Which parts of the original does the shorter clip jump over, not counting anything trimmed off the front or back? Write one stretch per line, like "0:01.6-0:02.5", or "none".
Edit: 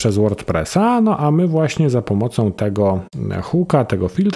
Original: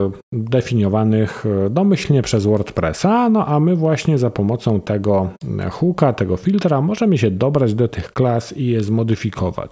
none